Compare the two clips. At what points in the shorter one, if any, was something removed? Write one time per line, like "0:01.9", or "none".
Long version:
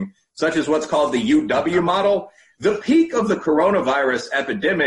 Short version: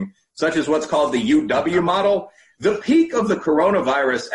none